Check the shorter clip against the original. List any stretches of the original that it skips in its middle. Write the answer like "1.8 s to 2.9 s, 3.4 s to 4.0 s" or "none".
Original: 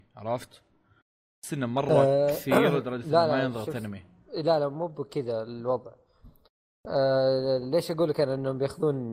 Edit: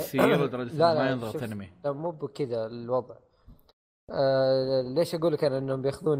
4.2 s to 4.6 s